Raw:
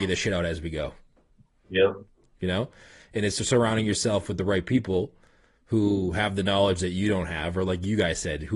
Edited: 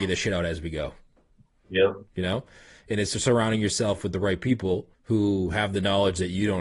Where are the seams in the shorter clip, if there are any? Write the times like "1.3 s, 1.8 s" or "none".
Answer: 2.1 s, 4.9 s